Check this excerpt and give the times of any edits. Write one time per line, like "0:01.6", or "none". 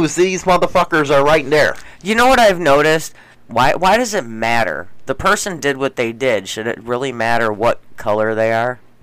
0:03.4